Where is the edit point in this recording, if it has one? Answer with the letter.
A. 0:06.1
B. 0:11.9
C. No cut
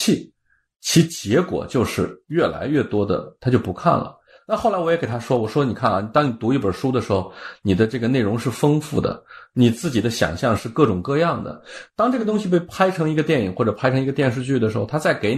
C